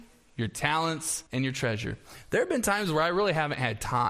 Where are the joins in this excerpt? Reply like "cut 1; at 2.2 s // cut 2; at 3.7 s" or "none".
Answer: cut 1; at 1.3 s